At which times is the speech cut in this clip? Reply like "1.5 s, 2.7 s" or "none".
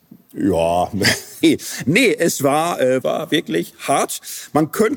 1.4 s, 3.0 s